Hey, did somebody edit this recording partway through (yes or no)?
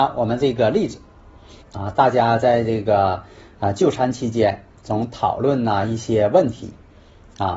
yes